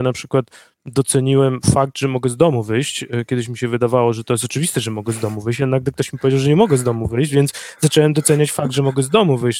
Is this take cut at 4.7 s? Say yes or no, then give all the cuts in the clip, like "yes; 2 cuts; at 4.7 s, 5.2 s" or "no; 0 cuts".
no; 0 cuts